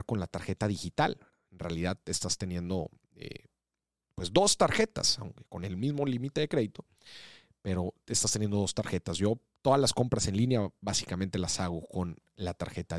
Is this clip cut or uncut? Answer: uncut